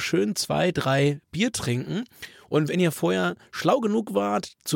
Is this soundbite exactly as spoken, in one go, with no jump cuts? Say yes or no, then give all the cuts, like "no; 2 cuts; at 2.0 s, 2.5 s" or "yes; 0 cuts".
yes; 0 cuts